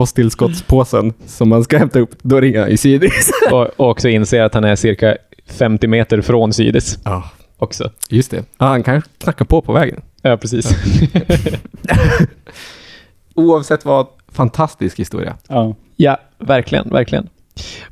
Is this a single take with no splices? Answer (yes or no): no